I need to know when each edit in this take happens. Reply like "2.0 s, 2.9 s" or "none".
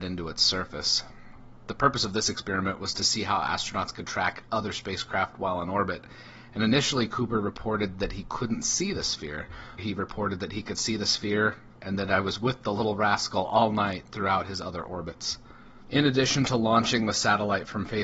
9.8 s